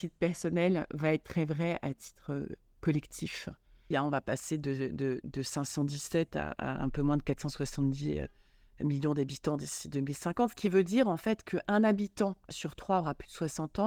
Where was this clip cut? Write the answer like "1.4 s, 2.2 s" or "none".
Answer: 3.9 s

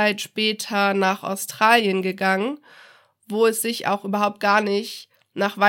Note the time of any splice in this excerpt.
none

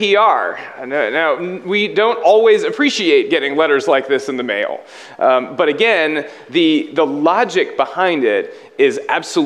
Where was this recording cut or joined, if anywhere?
none

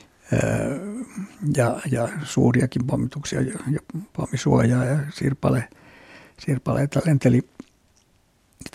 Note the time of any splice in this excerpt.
none

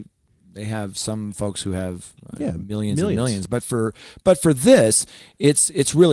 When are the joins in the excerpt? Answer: none

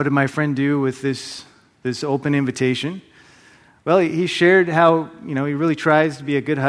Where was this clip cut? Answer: none

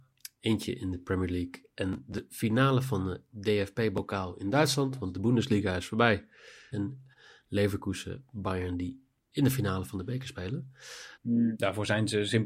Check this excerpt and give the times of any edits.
6.7 s, 11.1 s

